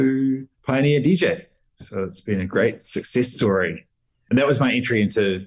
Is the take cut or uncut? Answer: uncut